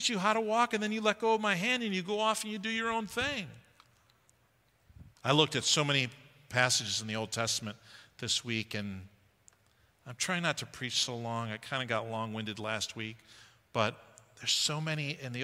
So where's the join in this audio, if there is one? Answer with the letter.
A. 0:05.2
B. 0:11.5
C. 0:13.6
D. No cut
A